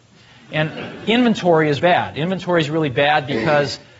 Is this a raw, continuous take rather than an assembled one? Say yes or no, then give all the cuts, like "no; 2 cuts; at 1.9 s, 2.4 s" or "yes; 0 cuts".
no; 1 cut; at 1.8 s